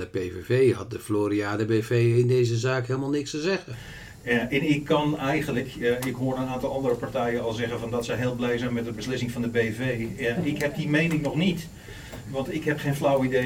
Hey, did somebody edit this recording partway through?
no; 0 cuts

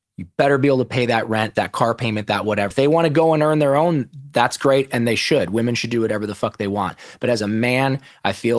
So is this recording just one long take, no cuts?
no; 2 cuts; at 1.6 s, 2.7 s

